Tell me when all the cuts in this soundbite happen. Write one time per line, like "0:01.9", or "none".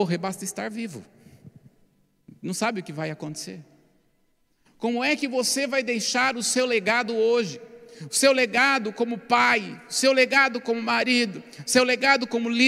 none